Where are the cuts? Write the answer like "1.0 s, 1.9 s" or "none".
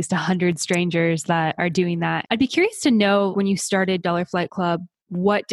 2.2 s, 3.3 s